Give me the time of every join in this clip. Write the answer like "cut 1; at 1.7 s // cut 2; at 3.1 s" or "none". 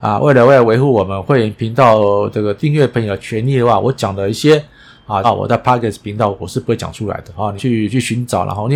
cut 1; at 5.2 s // cut 2; at 7.6 s